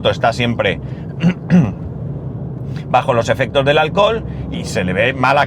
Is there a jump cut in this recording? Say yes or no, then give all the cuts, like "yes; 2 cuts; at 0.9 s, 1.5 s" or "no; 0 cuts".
yes; 1 cut; at 4.5 s